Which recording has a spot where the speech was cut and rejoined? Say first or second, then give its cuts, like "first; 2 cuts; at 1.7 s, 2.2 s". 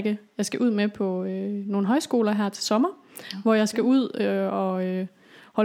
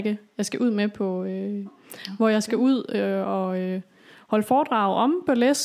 second; 1 cut; at 1.7 s